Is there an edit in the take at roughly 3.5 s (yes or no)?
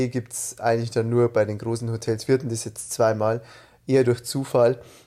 no